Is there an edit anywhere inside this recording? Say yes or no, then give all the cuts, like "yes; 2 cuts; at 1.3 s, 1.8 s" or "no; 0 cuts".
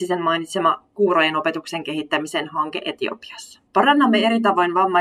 yes; 1 cut; at 3.7 s